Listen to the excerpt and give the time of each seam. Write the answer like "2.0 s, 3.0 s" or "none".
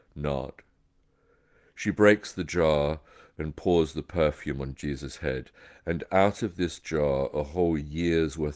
none

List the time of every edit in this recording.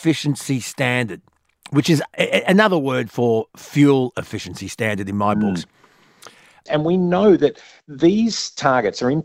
6.7 s

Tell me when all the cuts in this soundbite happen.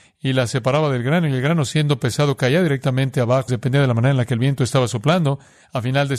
3.5 s

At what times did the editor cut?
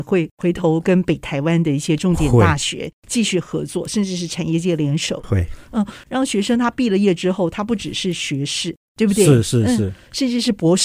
8.9 s

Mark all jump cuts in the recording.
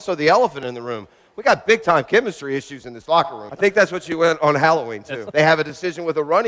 3.5 s, 5.3 s

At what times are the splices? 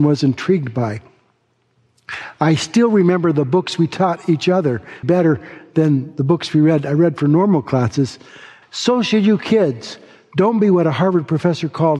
5.0 s, 8.6 s

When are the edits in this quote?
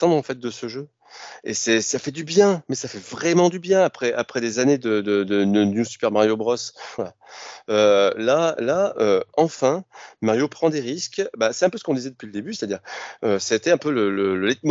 7.0 s

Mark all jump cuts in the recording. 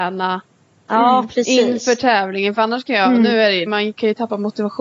3.7 s

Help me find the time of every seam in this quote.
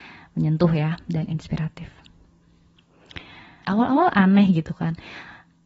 3.6 s

